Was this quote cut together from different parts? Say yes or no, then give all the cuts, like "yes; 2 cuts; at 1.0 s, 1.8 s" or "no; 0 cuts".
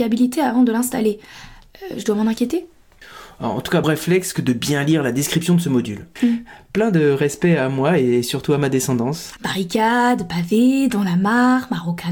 yes; 3 cuts; at 3.8 s, 6.2 s, 9.4 s